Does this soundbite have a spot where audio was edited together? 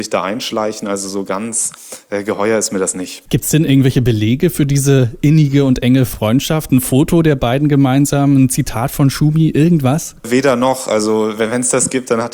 no; 0 cuts

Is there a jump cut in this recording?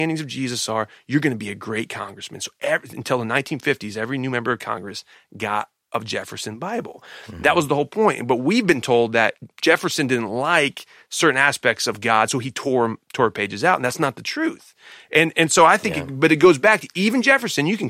no; 0 cuts

